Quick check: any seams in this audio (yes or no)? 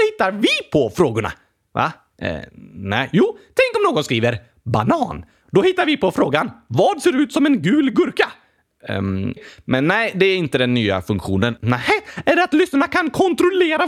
yes